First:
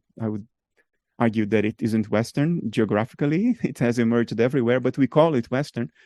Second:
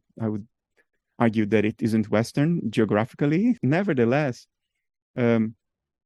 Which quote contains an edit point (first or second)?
second